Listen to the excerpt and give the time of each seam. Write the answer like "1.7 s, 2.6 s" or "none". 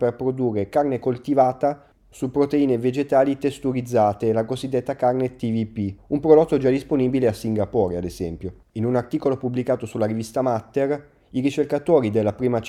6.0 s, 8.7 s